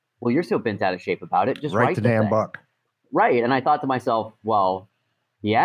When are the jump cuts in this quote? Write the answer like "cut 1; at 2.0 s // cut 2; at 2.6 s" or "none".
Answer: none